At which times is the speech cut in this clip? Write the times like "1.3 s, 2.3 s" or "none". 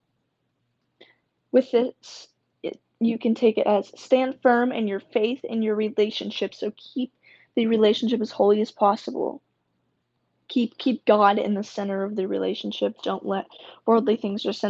none